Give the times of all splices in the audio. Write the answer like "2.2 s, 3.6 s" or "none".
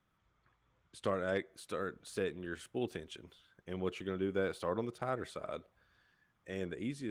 none